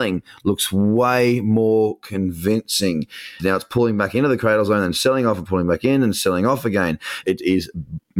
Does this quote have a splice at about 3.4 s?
yes; 2 cuts; at 3.4 s, 7.2 s

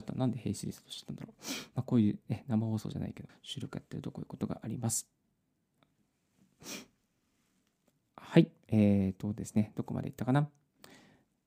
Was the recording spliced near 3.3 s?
yes; 1 cut; at 3.3 s

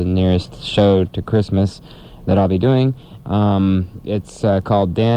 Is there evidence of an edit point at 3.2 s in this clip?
yes; 1 cut; at 3.2 s

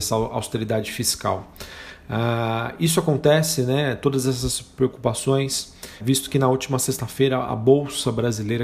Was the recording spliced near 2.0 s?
no; 1 cut; at 6.0 s

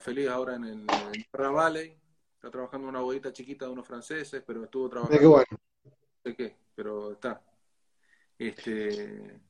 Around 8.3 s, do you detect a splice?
no; 1 cut; at 5.8 s

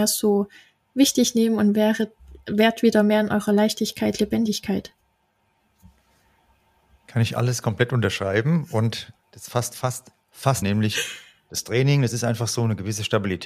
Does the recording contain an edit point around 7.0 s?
no; 1 cut; at 10.6 s

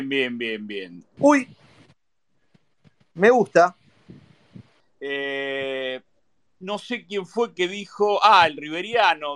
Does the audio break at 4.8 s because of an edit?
yes; 2 cuts; at 1.2 s, 4.8 s

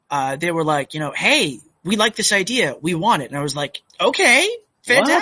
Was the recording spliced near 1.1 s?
no; 1 cut; at 3.9 s

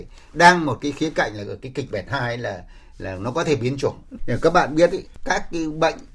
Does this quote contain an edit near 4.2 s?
yes; 1 cut; at 4.2 s

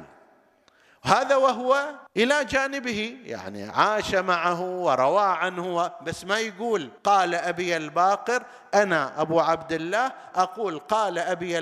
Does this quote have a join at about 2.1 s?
yes; 2 cuts; at 2.1 s, 7.0 s

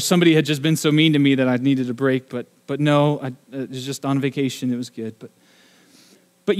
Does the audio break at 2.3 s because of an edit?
no; 1 cut; at 5.2 s

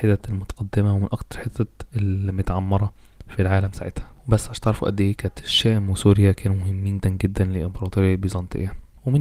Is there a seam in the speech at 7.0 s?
yes; 1 cut; at 7.0 s

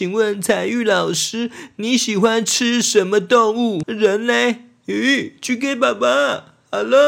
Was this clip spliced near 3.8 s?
yes; 1 cut; at 3.8 s

